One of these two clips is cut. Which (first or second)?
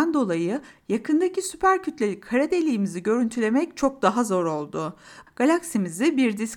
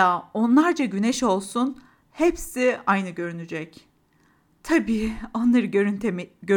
first